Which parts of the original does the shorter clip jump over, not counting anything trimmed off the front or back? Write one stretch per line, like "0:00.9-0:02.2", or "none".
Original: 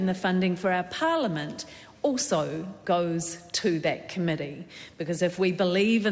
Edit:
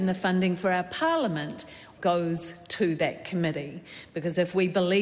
0:02.0-0:02.8